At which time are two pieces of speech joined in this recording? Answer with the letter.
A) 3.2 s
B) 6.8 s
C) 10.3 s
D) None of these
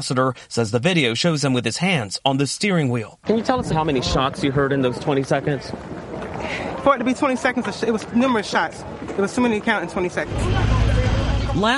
D